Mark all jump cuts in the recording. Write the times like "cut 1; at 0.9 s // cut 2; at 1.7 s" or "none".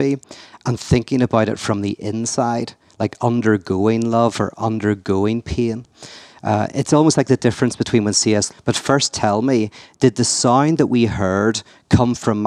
cut 1; at 8.5 s